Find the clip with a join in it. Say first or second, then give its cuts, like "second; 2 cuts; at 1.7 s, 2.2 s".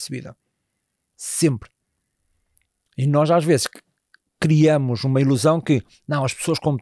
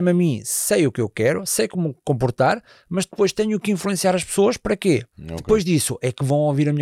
second; 1 cut; at 5.1 s